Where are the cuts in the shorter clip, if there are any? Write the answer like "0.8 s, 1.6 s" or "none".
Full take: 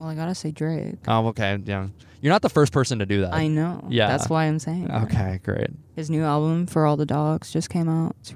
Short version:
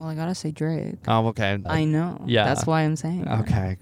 1.6 s